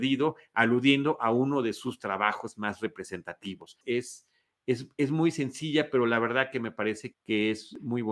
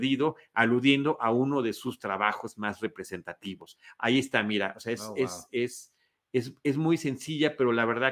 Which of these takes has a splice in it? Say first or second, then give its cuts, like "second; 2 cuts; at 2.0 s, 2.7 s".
first; 2 cuts; at 3.8 s, 7.1 s